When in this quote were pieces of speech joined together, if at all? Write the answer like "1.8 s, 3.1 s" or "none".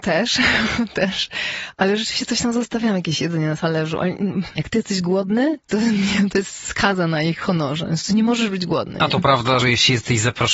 4.5 s, 6.3 s, 9.6 s